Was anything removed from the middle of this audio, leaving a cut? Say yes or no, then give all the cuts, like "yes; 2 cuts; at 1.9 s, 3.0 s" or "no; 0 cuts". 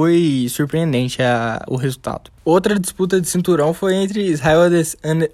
no; 0 cuts